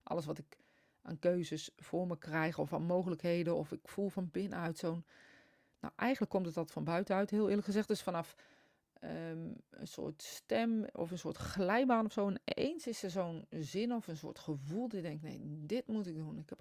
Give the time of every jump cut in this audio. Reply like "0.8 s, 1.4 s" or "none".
none